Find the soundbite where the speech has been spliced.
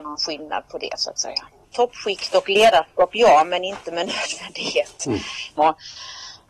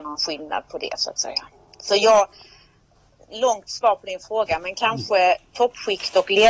first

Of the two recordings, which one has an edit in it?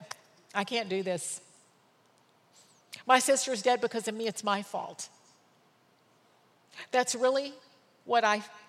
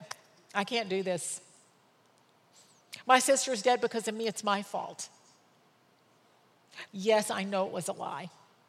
second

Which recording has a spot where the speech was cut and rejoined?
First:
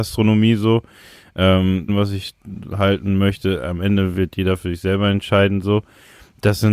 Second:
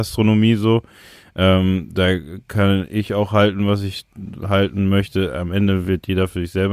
first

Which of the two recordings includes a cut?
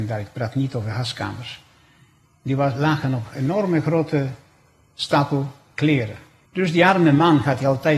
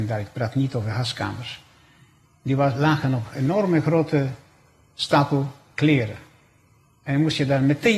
first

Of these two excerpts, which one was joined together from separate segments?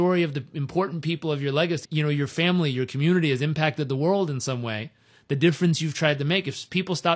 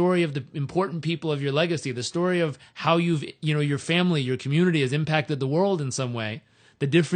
first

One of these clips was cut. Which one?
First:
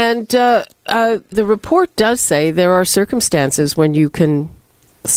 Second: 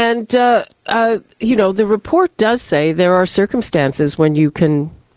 first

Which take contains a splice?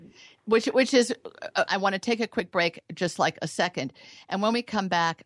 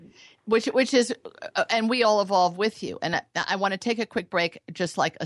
first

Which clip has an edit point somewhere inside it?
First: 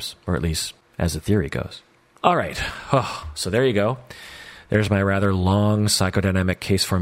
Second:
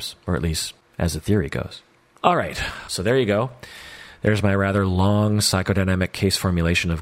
second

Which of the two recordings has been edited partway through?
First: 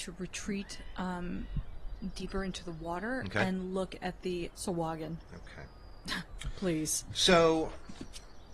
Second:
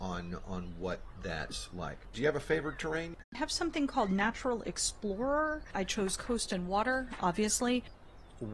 first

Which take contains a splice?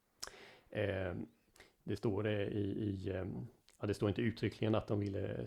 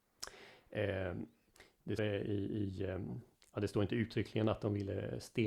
second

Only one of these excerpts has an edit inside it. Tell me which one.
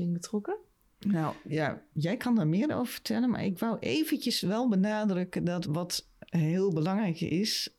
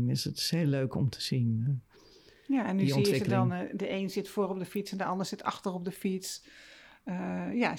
first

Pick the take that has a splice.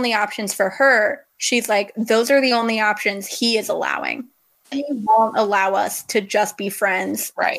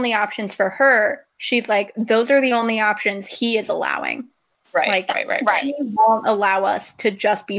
first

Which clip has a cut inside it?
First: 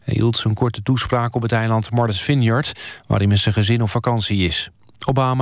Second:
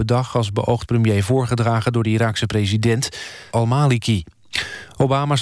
second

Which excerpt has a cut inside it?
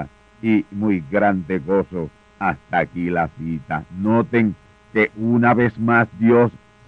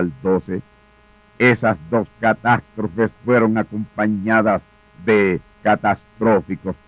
first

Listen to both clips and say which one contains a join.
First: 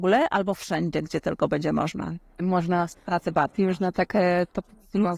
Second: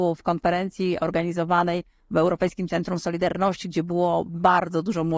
first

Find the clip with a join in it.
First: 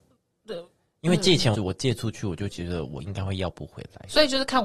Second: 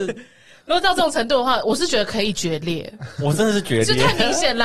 first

